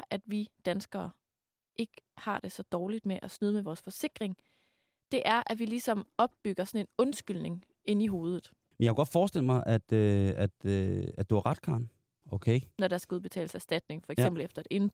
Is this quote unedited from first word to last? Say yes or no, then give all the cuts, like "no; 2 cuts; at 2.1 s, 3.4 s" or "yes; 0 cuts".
no; 2 cuts; at 8.7 s, 12.2 s